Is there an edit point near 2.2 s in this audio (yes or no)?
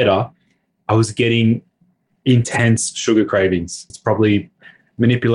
no